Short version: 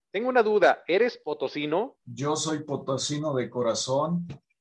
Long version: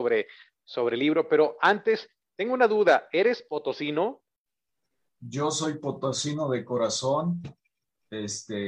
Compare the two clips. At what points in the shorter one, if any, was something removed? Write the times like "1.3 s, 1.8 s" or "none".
2.0 s